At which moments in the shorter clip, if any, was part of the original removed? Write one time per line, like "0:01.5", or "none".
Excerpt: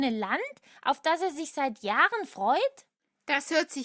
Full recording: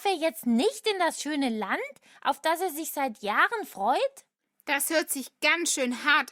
none